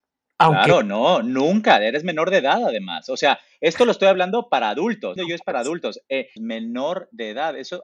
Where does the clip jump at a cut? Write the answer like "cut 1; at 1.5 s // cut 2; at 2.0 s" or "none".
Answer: cut 1; at 5.2 s // cut 2; at 6.4 s